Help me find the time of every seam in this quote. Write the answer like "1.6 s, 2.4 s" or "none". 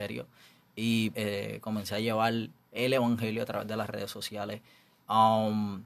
1.1 s